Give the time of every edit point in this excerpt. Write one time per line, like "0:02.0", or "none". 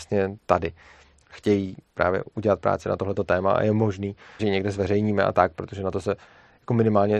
0:01.2
0:04.4